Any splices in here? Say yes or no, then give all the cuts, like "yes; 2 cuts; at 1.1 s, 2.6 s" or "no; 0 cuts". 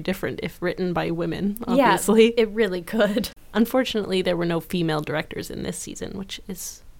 no; 0 cuts